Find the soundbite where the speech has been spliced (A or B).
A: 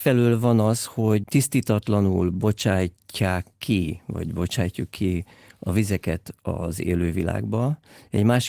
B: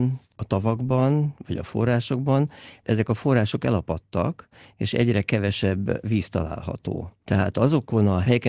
B